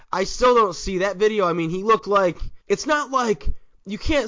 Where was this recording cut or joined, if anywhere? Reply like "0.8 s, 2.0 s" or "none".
2.6 s